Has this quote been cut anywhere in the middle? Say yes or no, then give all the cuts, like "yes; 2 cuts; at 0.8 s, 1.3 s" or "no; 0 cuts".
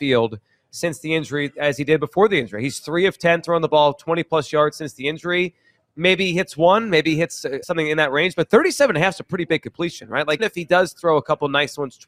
yes; 2 cuts; at 7.6 s, 10.4 s